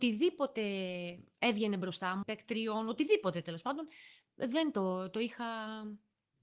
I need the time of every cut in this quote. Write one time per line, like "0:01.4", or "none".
0:02.2